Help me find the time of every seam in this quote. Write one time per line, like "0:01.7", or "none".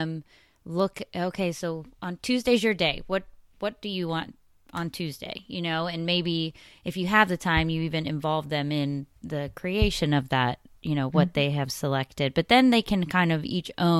none

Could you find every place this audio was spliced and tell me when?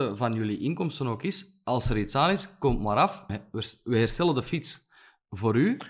0:03.3

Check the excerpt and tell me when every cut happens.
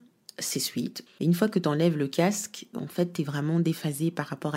0:01.1
0:02.7

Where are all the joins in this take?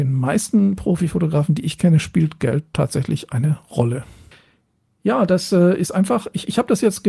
none

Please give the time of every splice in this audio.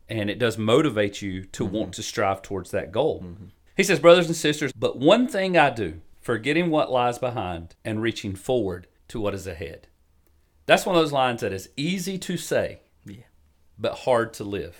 0:03.7
0:04.7

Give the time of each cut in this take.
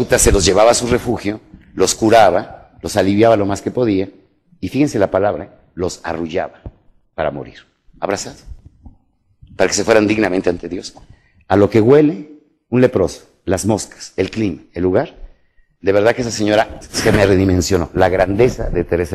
0:16.8

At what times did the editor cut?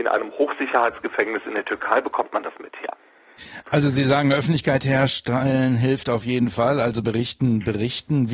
0:07.0

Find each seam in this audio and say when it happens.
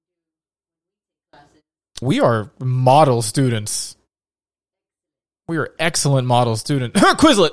0:02.0

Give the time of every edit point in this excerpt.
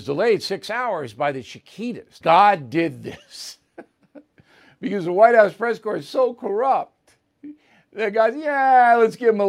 0:02.2

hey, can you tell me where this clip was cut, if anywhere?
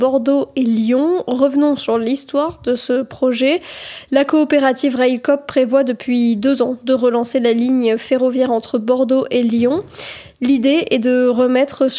none

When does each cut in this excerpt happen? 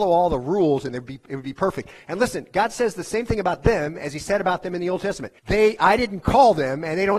0:05.4

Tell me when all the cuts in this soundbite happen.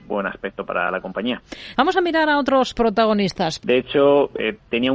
0:01.7
0:03.6

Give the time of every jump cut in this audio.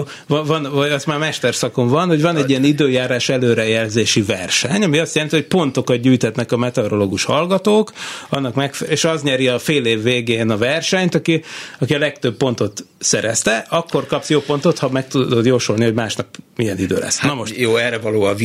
0:08.9

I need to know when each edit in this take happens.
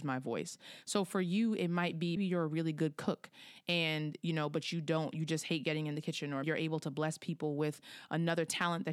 0:02.2
0:06.4

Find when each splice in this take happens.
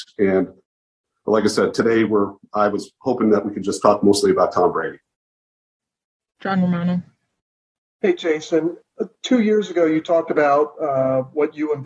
none

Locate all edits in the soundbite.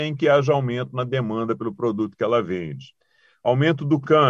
none

